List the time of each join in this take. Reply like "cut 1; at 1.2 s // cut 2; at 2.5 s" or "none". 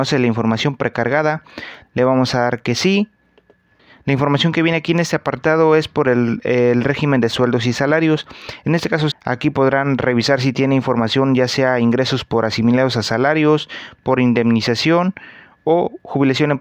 cut 1; at 9.1 s

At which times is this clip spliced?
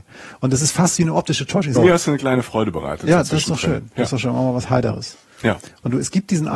cut 1; at 1.8 s

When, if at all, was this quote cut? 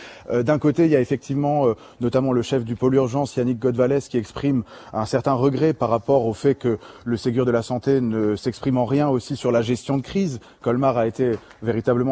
none

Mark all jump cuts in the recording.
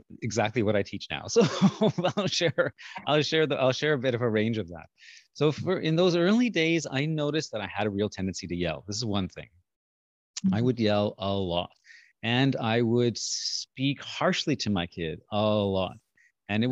none

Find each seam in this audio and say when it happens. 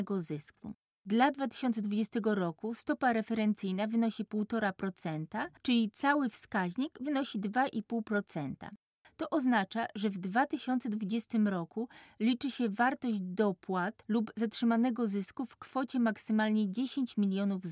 cut 1; at 5.6 s // cut 2; at 9.0 s

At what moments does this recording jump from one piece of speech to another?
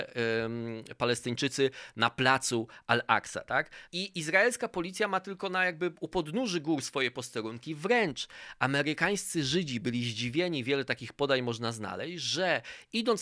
cut 1; at 3.9 s

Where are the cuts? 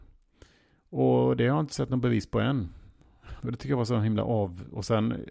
cut 1; at 3.4 s

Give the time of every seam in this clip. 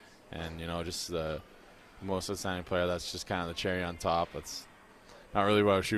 none

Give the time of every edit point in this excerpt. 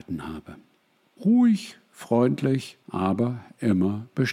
cut 1; at 1.2 s // cut 2; at 2.8 s

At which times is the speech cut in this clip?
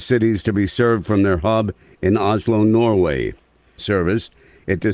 cut 1; at 3.8 s

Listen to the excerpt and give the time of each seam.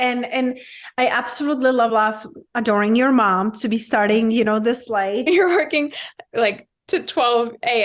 cut 1; at 1.9 s // cut 2; at 5.3 s

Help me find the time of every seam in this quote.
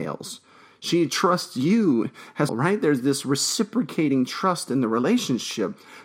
cut 1; at 2.5 s

